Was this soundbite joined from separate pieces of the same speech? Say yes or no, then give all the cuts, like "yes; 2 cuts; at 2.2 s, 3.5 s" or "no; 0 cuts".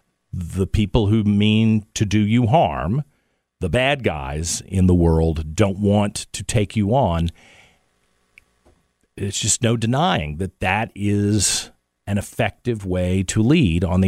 no; 0 cuts